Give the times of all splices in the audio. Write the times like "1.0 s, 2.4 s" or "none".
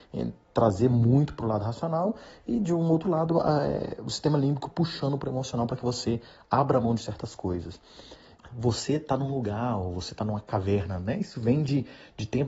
8.3 s